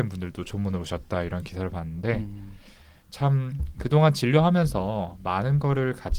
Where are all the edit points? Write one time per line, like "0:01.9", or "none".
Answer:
none

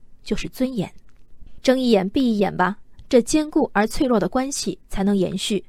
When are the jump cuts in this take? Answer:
none

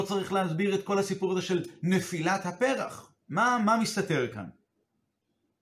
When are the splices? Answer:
0:03.2

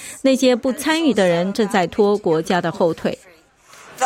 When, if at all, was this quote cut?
none

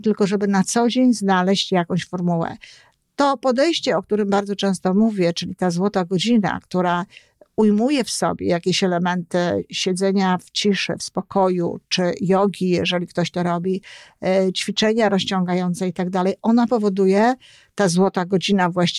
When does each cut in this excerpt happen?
none

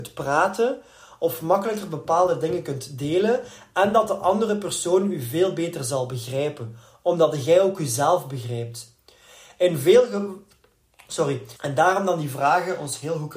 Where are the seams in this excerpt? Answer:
0:11.6

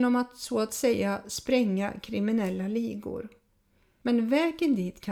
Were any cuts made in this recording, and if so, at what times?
none

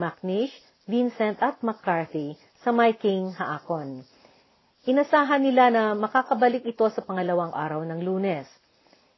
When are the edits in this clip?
0:07.5

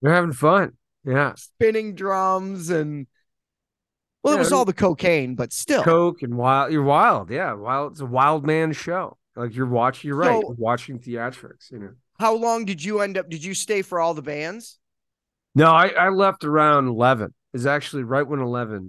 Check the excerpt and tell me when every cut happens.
none

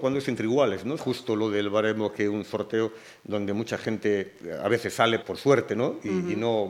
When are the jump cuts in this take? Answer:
0:01.0
0:05.2

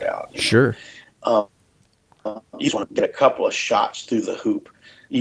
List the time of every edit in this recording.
none

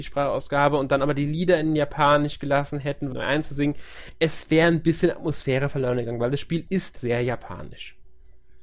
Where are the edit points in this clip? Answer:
0:03.1
0:07.0

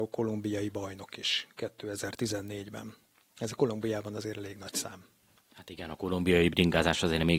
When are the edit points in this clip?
none

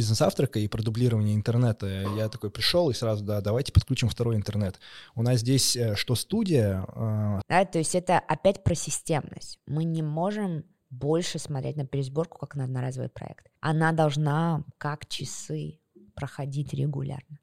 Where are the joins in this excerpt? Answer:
0:07.4
0:13.6

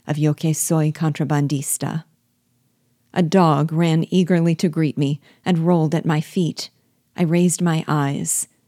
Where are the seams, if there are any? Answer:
0:07.0

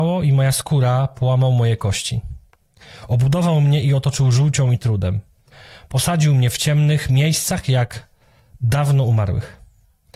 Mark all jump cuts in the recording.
none

